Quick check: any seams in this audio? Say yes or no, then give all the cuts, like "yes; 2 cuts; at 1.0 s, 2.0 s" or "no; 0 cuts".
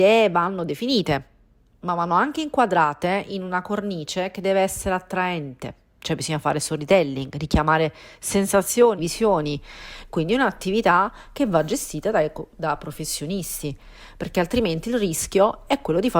yes; 1 cut; at 9.0 s